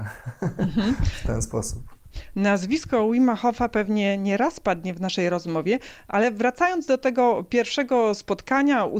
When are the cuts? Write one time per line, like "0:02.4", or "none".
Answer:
none

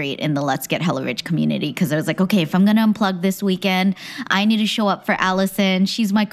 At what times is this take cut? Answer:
none

